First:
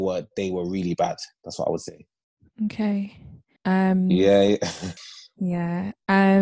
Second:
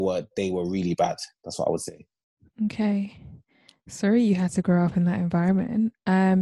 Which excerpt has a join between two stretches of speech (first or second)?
first